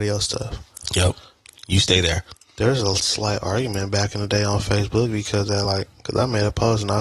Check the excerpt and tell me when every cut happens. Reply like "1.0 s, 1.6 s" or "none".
none

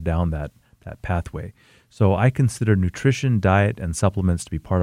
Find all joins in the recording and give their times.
none

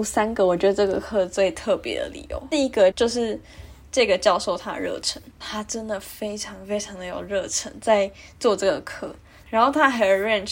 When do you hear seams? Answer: 2.9 s, 5.4 s, 9.4 s

